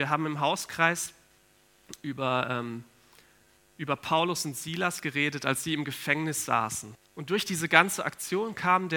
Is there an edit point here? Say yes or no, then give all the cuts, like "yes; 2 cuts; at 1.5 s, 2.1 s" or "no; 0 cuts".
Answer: yes; 1 cut; at 7.0 s